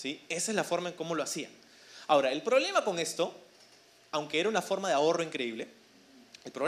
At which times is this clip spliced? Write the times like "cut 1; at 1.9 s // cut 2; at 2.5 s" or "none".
none